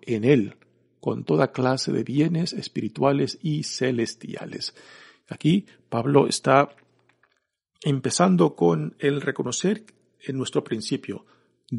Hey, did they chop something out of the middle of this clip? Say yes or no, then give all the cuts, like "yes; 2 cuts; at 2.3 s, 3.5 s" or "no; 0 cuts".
no; 0 cuts